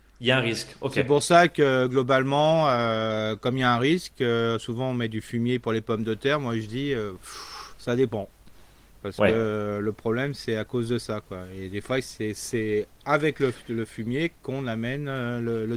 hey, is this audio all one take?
yes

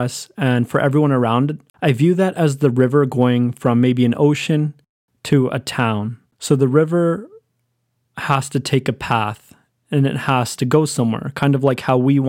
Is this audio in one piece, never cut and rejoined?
no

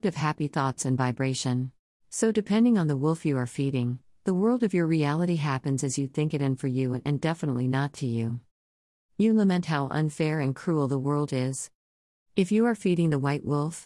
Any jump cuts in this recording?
yes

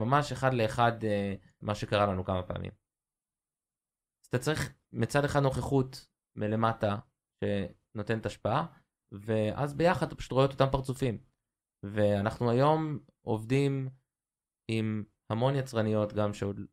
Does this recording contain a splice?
yes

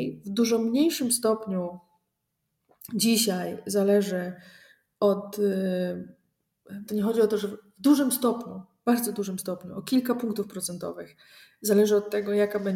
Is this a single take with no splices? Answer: no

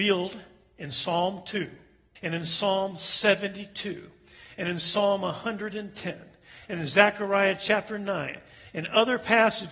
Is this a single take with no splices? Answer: no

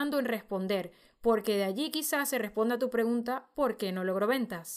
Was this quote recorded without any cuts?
yes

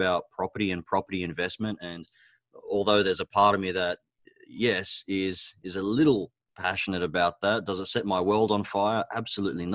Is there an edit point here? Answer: no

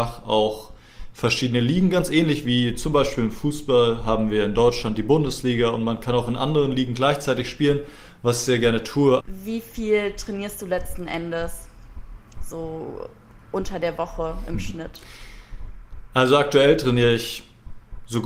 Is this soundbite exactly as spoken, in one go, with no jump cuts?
no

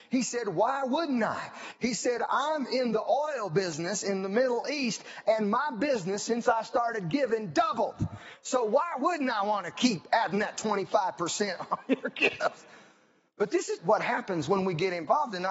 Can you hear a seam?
yes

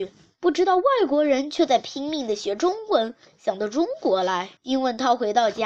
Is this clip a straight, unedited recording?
no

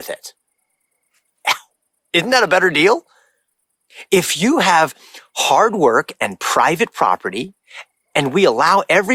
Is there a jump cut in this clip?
no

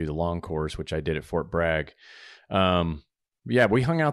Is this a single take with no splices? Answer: yes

